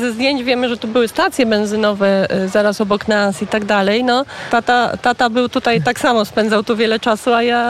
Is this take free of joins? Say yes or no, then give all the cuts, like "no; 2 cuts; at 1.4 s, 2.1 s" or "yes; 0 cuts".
no; 1 cut; at 4.5 s